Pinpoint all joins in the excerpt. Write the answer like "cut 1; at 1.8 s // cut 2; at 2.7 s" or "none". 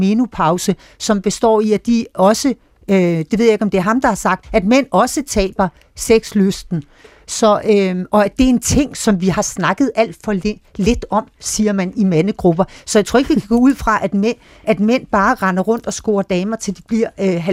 cut 1; at 4.4 s